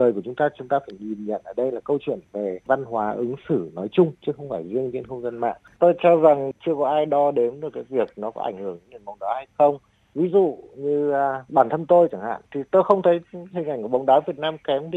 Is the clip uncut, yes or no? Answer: no